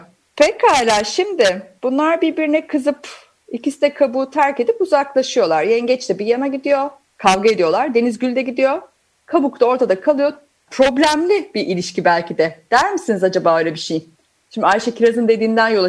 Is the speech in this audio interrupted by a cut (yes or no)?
yes